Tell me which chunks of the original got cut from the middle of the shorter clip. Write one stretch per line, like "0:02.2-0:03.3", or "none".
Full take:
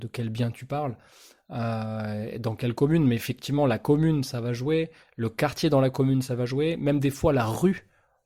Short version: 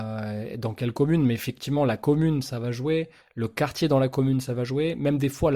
none

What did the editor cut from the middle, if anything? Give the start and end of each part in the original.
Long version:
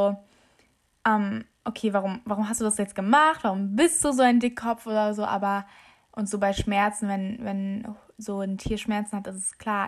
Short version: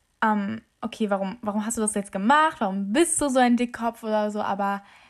none

